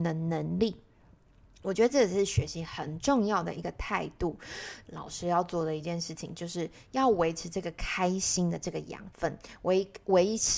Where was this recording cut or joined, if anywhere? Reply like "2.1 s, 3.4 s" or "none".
4.8 s